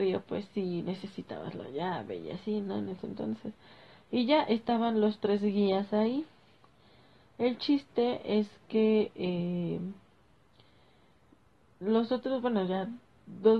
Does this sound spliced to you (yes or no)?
no